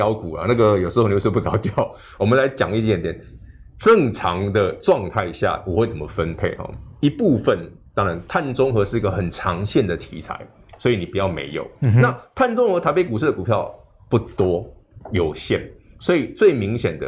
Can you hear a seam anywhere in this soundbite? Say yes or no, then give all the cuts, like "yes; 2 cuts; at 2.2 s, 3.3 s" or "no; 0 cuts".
no; 0 cuts